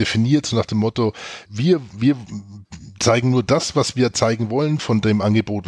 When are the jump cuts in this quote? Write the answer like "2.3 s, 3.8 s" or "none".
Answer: 1.5 s